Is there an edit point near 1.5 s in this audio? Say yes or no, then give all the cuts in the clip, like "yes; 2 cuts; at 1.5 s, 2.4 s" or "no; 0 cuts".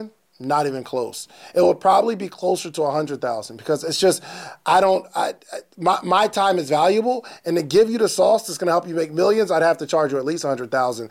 no; 0 cuts